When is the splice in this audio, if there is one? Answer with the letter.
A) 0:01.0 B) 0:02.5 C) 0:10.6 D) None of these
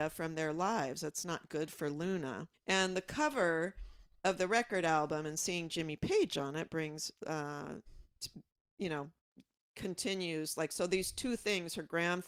B